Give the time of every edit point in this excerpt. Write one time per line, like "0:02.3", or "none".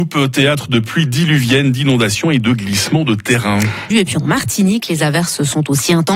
0:03.9